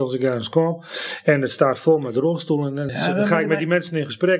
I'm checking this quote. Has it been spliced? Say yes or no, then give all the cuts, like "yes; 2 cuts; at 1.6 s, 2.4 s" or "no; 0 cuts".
yes; 1 cut; at 2.9 s